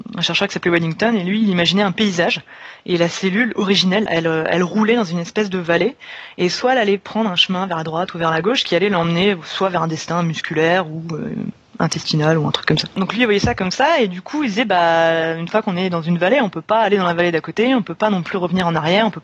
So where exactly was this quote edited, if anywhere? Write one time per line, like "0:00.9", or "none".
0:04.1